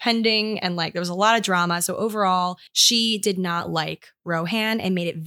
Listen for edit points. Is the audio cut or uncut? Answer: cut